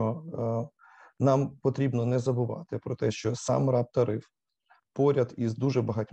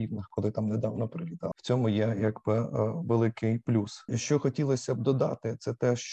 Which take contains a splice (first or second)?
second